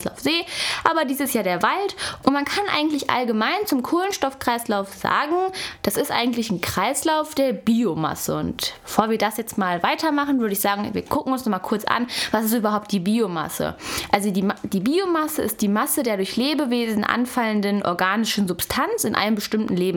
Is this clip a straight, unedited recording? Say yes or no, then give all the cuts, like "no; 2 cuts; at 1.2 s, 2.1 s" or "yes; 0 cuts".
no; 1 cut; at 2.2 s